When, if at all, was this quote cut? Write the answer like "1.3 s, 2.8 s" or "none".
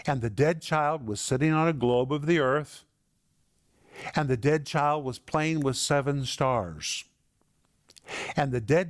none